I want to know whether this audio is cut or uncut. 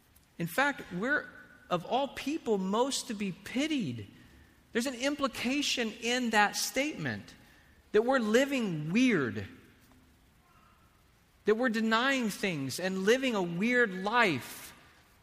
uncut